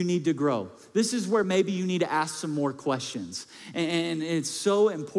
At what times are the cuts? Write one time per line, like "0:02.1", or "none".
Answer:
none

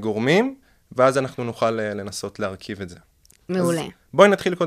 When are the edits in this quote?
none

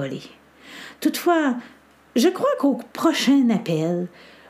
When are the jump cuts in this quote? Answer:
none

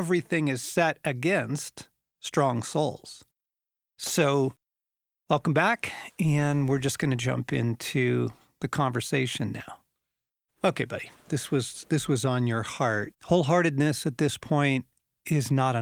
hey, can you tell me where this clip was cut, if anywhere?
0:11.2
0:13.1

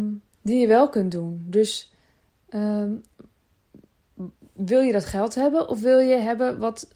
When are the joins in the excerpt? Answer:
none

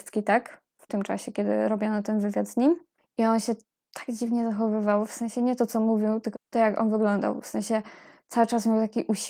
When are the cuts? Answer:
0:06.3

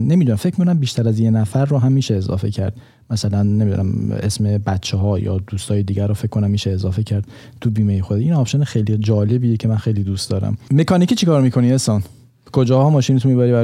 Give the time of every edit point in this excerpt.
none

